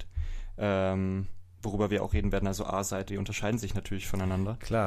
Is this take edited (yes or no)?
yes